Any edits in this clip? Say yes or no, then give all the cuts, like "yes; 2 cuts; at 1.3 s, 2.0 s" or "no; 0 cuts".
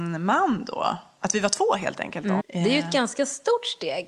yes; 2 cuts; at 1.2 s, 2.4 s